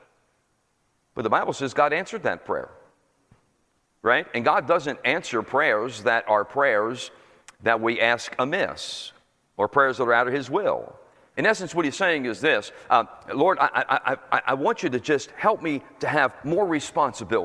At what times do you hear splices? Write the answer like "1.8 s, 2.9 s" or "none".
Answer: 11.3 s